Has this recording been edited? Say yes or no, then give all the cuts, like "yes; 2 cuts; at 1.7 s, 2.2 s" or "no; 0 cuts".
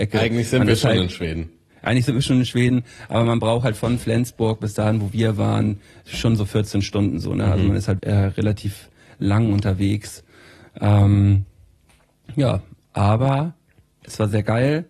yes; 1 cut; at 8.0 s